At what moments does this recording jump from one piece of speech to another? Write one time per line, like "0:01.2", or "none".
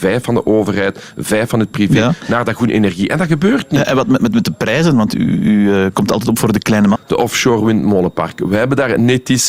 0:07.0